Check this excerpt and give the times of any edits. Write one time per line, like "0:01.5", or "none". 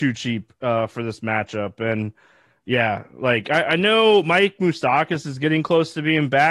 none